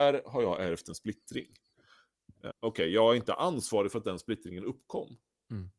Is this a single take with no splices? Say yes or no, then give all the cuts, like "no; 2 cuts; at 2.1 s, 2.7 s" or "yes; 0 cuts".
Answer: no; 1 cut; at 2.5 s